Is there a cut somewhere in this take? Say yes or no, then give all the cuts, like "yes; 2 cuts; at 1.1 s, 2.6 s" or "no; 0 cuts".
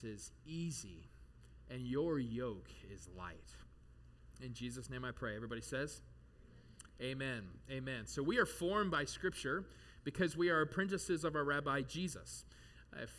no; 0 cuts